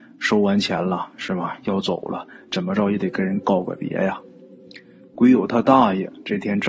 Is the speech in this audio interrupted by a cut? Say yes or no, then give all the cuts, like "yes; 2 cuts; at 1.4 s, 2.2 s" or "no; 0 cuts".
yes; 1 cut; at 5.2 s